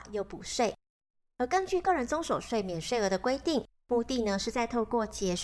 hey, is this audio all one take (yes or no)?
yes